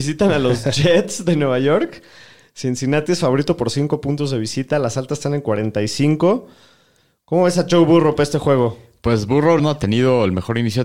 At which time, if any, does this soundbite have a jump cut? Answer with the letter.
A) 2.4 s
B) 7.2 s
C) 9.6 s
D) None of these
C